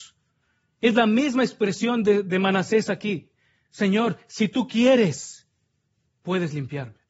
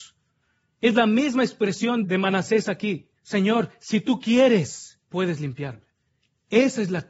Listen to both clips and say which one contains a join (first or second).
second